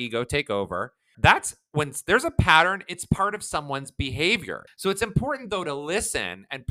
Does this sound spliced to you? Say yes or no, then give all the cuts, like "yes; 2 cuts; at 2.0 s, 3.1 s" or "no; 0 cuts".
yes; 2 cuts; at 1.1 s, 4.7 s